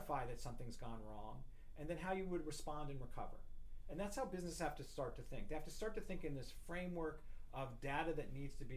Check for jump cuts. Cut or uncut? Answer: uncut